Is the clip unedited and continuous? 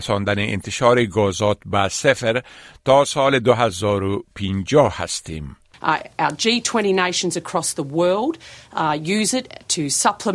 no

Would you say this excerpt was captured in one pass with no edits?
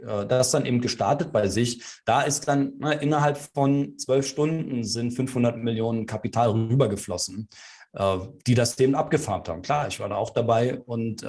yes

